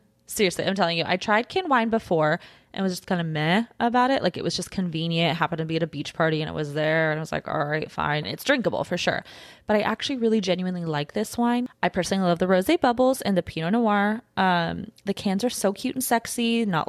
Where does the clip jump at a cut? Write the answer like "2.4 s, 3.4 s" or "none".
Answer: 8.2 s